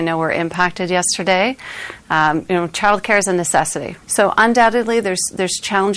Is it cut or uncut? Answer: cut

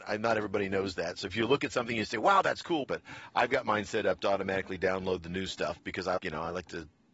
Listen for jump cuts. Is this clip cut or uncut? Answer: cut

